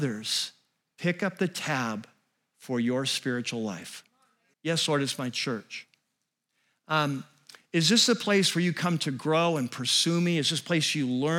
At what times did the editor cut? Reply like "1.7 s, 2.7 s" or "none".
4.5 s